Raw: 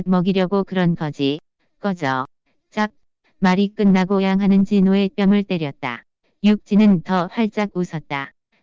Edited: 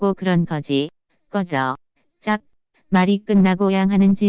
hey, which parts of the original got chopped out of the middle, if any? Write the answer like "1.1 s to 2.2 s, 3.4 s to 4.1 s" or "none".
none